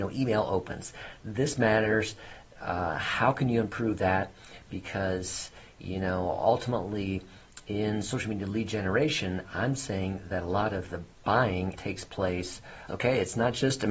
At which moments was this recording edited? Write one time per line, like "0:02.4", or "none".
0:11.7
0:12.9